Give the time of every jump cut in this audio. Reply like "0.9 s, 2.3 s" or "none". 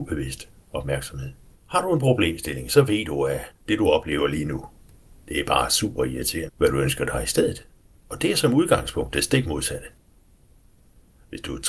1.6 s, 6.5 s